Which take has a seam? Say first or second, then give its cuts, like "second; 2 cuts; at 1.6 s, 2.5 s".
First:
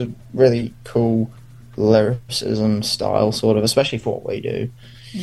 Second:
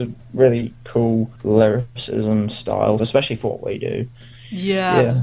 second; 2 cuts; at 1.4 s, 3.0 s